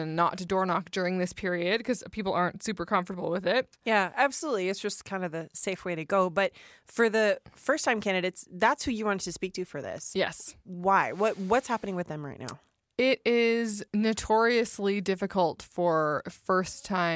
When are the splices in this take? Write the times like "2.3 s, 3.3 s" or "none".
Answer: 13.9 s